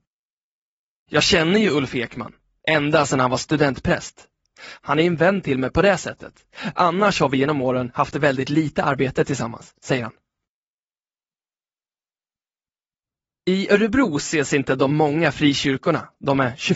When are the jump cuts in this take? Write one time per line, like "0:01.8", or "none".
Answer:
none

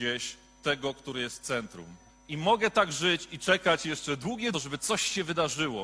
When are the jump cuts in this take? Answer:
0:02.1
0:04.5

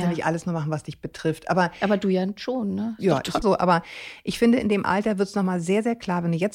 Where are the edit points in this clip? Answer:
0:03.4

